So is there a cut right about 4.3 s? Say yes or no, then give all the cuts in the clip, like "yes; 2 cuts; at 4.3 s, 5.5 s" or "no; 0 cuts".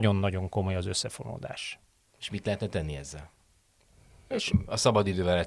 yes; 1 cut; at 4.3 s